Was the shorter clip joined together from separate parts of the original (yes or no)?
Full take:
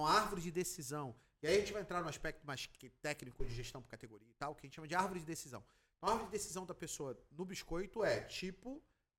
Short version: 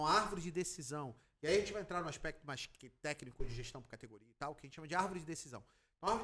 no